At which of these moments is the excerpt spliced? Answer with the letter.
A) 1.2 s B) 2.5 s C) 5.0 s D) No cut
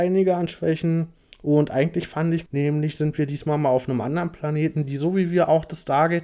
B